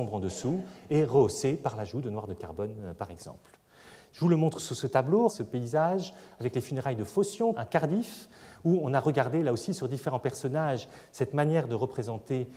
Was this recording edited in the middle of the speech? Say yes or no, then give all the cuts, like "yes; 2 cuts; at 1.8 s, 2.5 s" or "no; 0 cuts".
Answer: yes; 2 cuts; at 5.3 s, 7.5 s